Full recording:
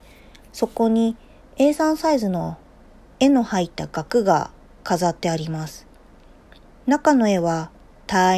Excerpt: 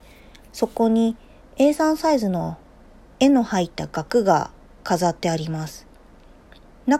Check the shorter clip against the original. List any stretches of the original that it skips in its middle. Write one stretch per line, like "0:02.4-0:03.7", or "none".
none